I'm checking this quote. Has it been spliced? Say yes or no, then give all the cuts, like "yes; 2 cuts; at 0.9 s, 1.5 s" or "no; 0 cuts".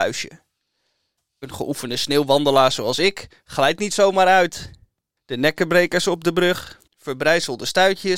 yes; 2 cuts; at 5.2 s, 6.9 s